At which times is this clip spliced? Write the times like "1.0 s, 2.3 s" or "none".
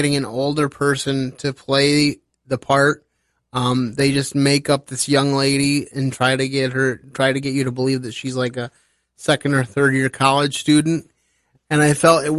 none